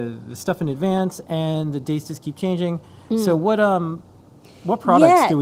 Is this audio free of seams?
yes; 0 cuts

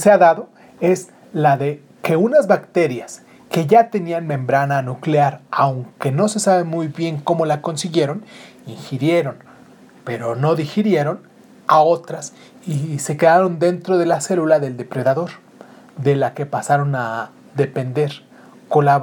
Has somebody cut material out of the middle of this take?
no; 0 cuts

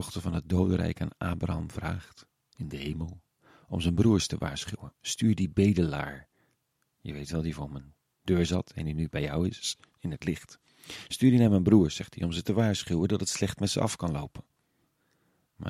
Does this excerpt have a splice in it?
no; 0 cuts

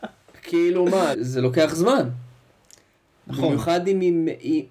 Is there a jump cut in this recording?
yes; 1 cut; at 1.1 s

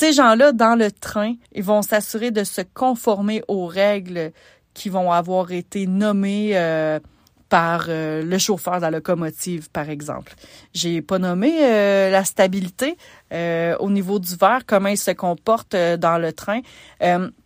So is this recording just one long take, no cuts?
no; 1 cut; at 1.4 s

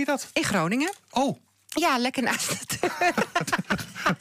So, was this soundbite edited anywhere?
no; 0 cuts

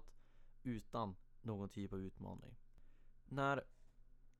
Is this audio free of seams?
no; 1 cut; at 3.3 s

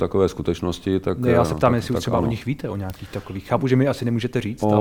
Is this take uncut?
yes; 0 cuts

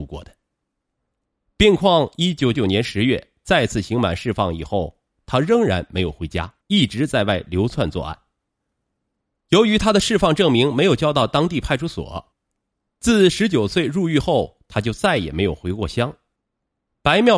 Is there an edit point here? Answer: yes; 2 cuts; at 2.5 s, 6.6 s

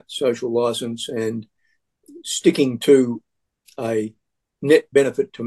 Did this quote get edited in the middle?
no; 0 cuts

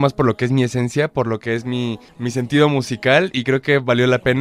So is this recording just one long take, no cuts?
yes; 0 cuts

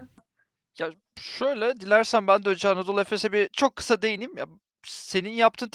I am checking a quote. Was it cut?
no; 0 cuts

